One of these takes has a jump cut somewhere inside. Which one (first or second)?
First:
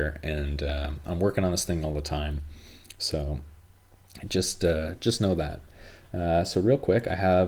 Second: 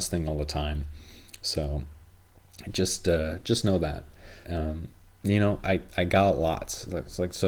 second